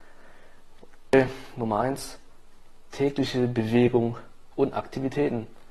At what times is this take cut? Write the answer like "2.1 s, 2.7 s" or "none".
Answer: 1.1 s

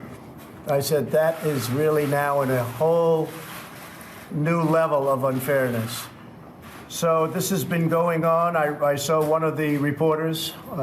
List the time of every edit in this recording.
none

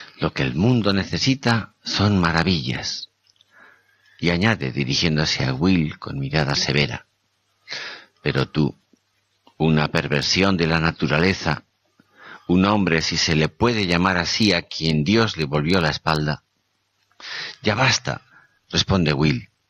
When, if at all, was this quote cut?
18.7 s

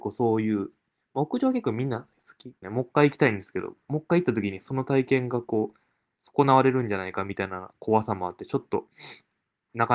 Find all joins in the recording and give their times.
2.6 s

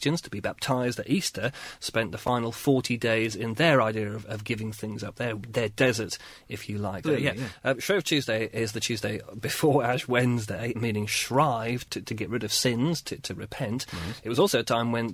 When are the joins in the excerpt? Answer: 7.0 s, 10.7 s

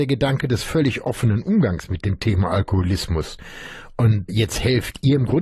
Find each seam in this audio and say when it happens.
4.3 s

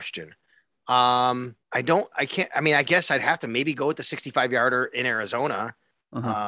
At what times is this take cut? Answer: 1.6 s

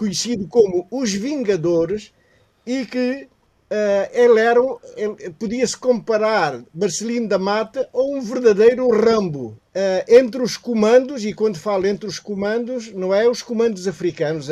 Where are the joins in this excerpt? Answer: 9.6 s

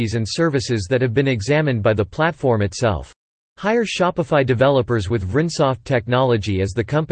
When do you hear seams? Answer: 3.5 s

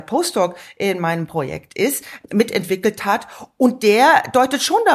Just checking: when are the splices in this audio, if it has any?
none

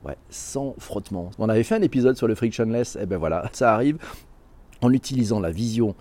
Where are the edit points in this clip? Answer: 1.3 s, 3.5 s

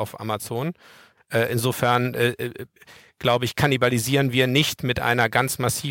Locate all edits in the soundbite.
1.2 s

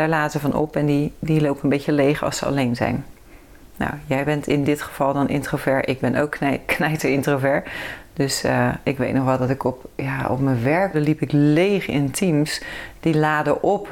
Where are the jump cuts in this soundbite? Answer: 9.9 s, 10.9 s, 13.0 s

